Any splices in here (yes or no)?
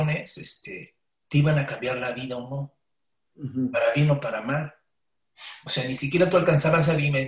yes